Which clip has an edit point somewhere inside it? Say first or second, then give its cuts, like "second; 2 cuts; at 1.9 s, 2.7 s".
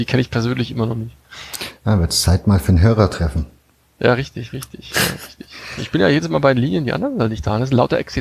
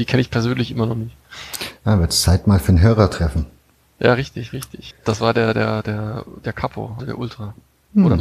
second; 2 cuts; at 4.9 s, 7.0 s